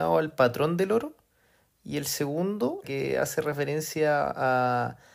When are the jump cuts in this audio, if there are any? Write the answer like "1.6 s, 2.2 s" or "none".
2.8 s